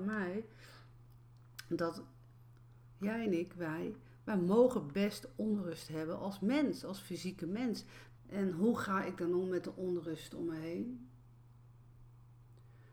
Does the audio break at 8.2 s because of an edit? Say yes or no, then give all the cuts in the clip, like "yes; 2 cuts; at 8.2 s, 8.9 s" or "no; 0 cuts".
yes; 1 cut; at 8.2 s